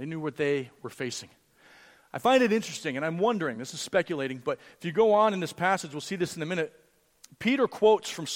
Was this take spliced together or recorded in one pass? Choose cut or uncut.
uncut